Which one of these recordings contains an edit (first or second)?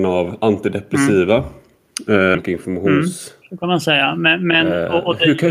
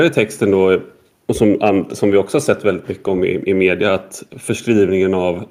first